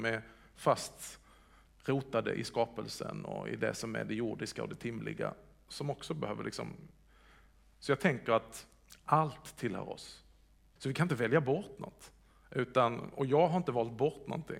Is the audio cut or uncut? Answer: cut